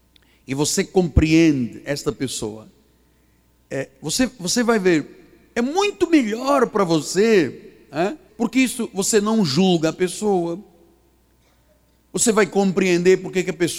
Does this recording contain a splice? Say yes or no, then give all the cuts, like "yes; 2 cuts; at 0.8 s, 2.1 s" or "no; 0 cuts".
yes; 1 cut; at 8.3 s